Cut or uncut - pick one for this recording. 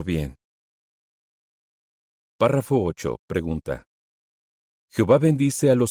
cut